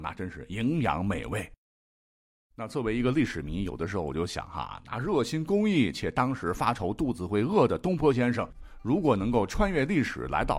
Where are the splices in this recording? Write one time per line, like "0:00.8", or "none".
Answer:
none